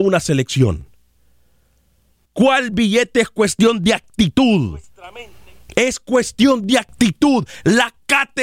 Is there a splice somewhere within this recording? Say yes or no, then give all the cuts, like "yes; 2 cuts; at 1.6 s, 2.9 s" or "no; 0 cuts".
yes; 1 cut; at 2.2 s